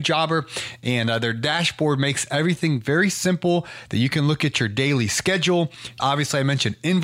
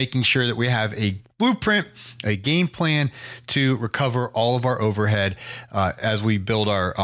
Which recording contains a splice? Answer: first; 1 cut; at 6.0 s

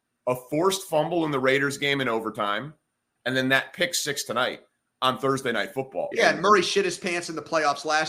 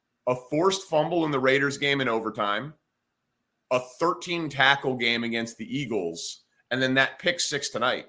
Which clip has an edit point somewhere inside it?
first; 2 cuts; at 3.2 s, 6.1 s

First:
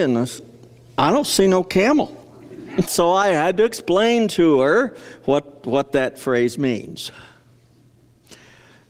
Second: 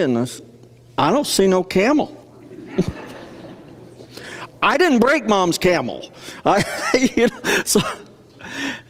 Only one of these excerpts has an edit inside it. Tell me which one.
first; 1 cut; at 2.9 s

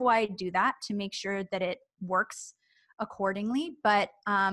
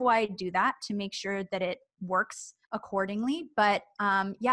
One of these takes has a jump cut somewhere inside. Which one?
second; 1 cut; at 2.6 s

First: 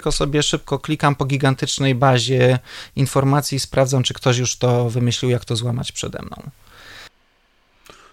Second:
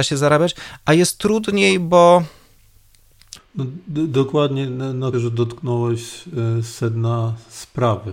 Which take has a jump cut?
second; 2 cuts; at 3.4 s, 5.1 s

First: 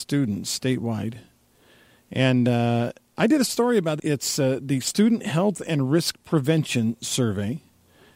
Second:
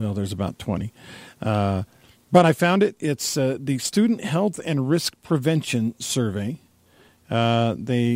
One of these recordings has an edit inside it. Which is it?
first; 1 cut; at 4.0 s

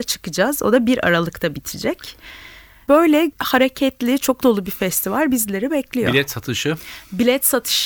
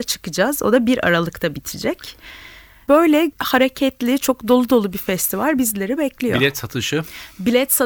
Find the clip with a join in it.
first; 1 cut; at 4.4 s

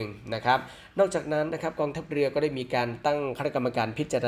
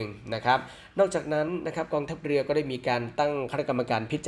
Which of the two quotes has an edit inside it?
first; 1 cut; at 1.5 s

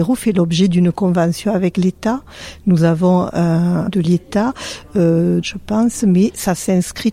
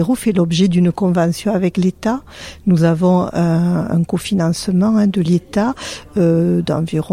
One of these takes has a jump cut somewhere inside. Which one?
first; 2 cuts; at 3.9 s, 5.4 s

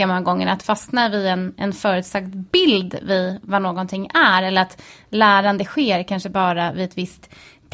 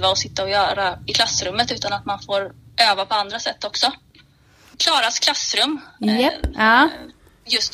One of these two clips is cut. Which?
second; 2 cuts; at 4.7 s, 6.5 s

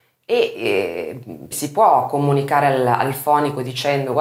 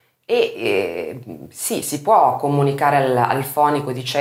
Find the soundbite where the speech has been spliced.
first; 1 cut; at 1.5 s

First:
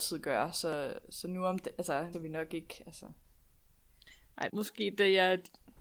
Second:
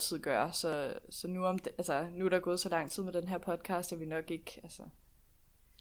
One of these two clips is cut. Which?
first; 2 cuts; at 2.1 s, 4.5 s

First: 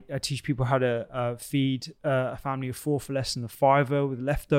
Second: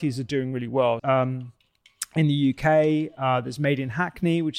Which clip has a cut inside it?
second; 1 cut; at 1.0 s

